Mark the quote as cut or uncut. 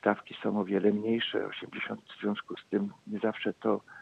cut